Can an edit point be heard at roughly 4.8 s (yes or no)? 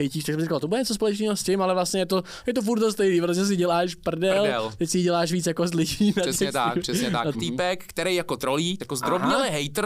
no